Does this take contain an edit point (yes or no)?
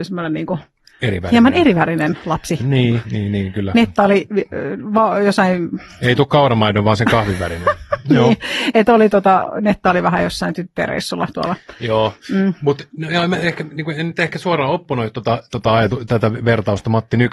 yes